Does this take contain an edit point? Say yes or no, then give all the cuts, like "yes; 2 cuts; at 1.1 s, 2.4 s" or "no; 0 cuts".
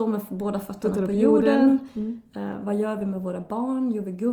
no; 0 cuts